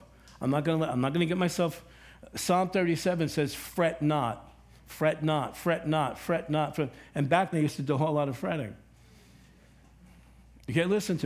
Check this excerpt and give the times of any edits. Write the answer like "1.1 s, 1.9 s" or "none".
7.5 s